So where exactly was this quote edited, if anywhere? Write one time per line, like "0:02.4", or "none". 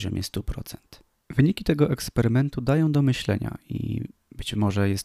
0:01.1